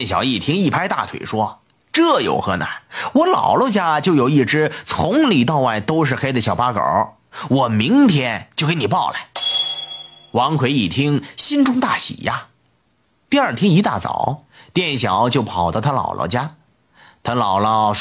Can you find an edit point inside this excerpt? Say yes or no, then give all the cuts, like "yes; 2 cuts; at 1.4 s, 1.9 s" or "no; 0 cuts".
no; 0 cuts